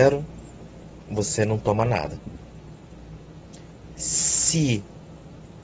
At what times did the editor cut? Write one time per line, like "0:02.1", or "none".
none